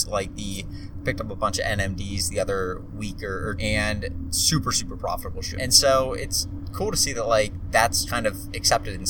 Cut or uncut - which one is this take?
cut